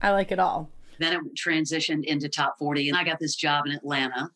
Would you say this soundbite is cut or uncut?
cut